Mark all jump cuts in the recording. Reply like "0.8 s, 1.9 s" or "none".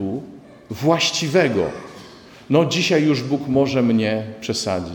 none

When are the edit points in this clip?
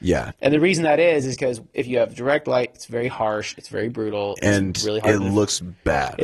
none

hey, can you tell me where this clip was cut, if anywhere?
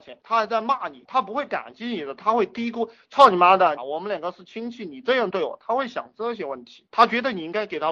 3.8 s

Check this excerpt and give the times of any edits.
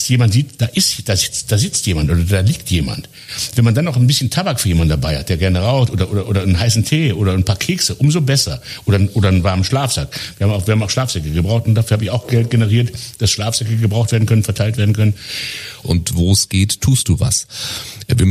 15.8 s

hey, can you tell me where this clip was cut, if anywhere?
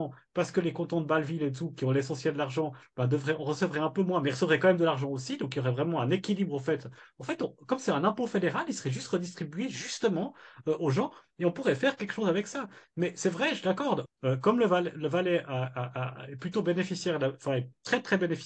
14.1 s

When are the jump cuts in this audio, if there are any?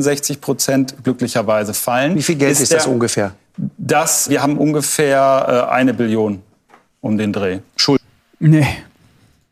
4.3 s

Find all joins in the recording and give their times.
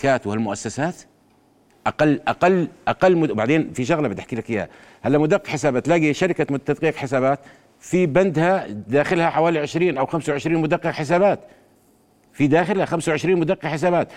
none

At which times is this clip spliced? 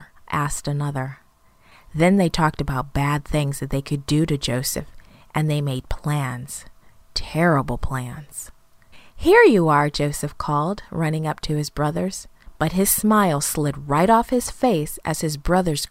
none

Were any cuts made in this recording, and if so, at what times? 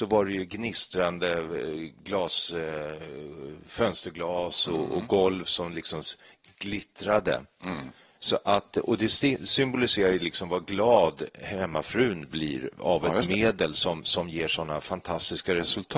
none

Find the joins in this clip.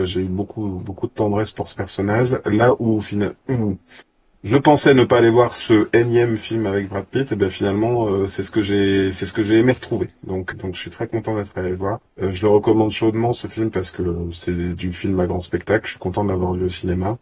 10.5 s, 12.1 s

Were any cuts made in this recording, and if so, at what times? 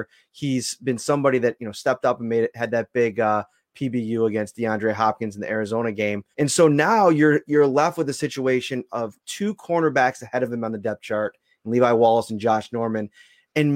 6.3 s

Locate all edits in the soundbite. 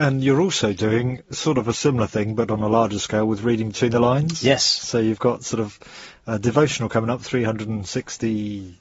none

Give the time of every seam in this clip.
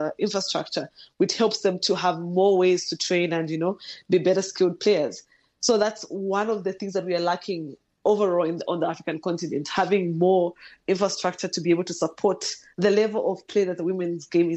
none

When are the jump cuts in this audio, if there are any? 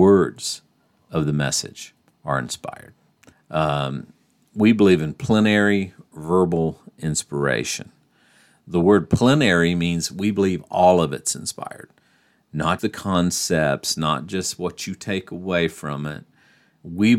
3.3 s, 12.8 s

